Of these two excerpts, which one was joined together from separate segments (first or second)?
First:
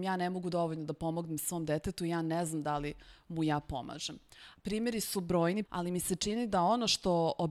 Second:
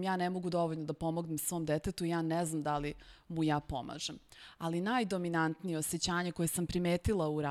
first